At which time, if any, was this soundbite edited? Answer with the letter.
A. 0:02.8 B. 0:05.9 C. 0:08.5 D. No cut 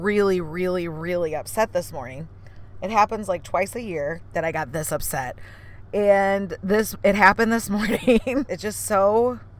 C